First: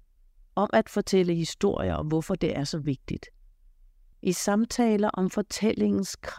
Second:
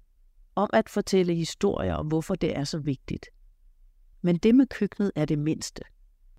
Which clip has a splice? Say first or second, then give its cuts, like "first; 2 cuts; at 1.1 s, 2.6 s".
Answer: second; 1 cut; at 4.1 s